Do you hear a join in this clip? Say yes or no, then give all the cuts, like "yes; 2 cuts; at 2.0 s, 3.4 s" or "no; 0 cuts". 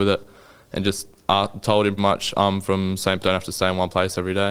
yes; 2 cuts; at 2.0 s, 3.2 s